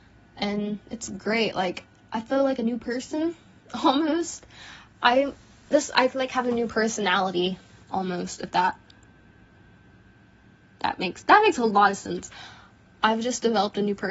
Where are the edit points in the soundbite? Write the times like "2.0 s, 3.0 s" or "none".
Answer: none